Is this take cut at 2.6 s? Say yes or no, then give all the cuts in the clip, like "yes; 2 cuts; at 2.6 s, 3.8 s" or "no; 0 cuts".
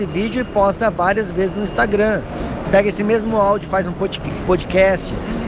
yes; 1 cut; at 2.6 s